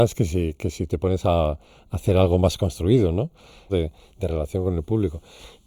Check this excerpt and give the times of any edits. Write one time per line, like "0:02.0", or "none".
0:03.7